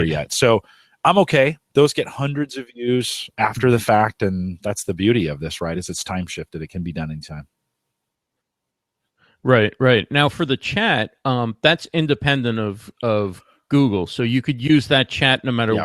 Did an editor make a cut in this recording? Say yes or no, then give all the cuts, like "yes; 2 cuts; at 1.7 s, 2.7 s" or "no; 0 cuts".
no; 0 cuts